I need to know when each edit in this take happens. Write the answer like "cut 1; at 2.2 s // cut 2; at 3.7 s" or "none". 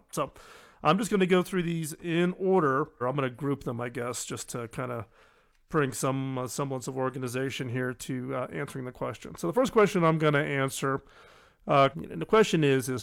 cut 1; at 3.0 s // cut 2; at 11.9 s